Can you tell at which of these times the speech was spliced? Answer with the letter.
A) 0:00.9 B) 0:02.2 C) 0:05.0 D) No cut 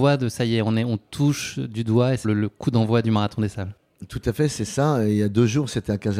B